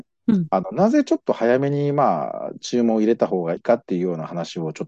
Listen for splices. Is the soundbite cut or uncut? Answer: cut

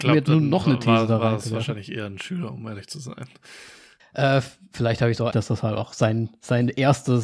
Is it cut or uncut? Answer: cut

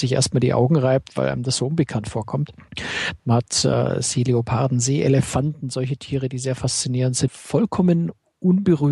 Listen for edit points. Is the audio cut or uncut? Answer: cut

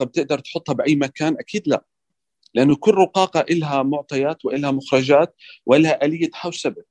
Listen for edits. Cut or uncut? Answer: uncut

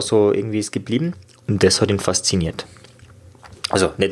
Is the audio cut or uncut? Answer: cut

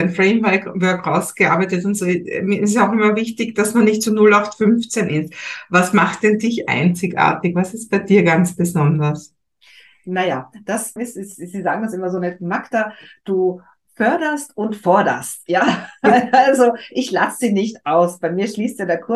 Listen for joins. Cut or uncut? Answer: cut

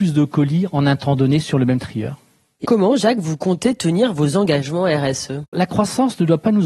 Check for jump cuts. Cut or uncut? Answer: cut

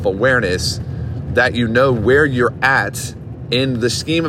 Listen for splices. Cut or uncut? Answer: uncut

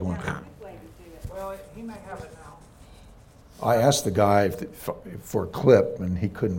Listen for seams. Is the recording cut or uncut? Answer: uncut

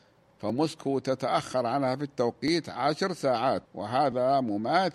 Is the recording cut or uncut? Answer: cut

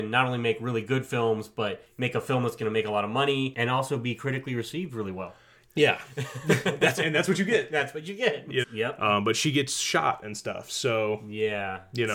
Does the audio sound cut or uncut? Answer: cut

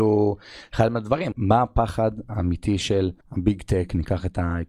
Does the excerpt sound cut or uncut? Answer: cut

